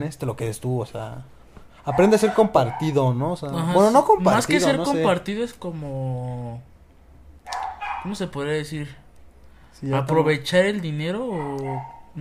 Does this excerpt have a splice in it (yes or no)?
no